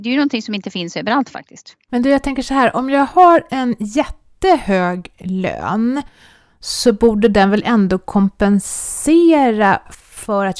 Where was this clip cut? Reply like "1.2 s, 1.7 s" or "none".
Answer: none